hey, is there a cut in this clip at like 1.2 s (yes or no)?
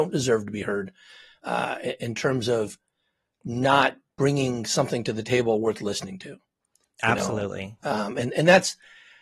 no